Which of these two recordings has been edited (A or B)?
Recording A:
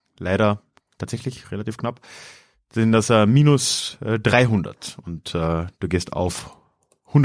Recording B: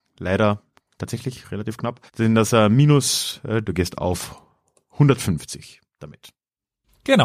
B